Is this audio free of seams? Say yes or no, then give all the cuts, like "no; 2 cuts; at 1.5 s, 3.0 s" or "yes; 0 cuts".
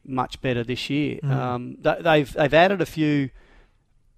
yes; 0 cuts